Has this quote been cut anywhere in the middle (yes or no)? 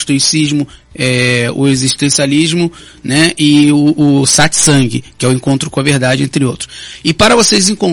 no